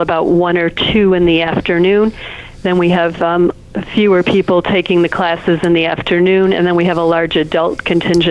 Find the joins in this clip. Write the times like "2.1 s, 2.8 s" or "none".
none